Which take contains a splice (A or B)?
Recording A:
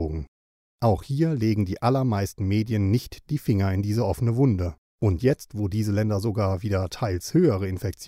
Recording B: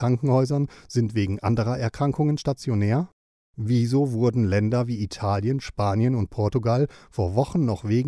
A